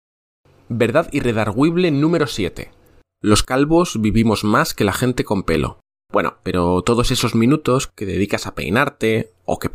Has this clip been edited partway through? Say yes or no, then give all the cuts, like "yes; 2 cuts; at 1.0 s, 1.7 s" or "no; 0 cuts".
yes; 1 cut; at 6.4 s